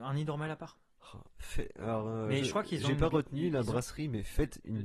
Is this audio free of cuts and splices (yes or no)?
yes